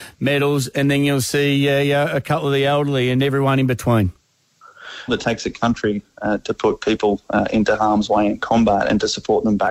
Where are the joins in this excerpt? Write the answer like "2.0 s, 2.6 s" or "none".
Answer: 5.1 s